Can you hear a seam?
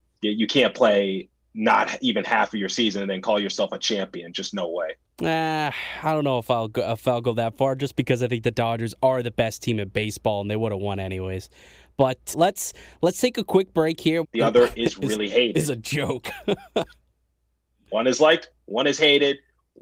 yes; 2 cuts; at 12.3 s, 14.2 s

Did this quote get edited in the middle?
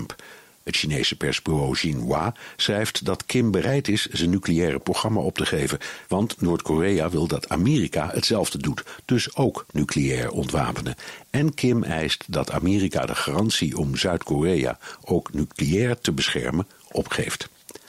yes; 1 cut; at 6.0 s

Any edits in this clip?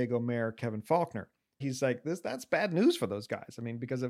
yes; 1 cut; at 1.6 s

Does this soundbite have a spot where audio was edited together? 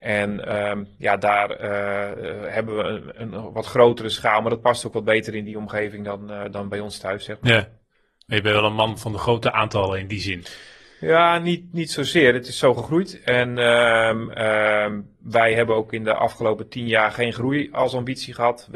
no; 0 cuts

